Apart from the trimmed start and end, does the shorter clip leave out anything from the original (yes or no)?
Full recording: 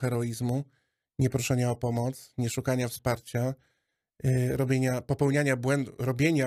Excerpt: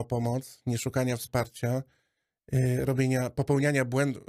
no